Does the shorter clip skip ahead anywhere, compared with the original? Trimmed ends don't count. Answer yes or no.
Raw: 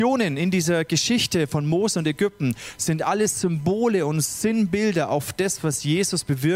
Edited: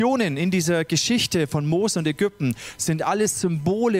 no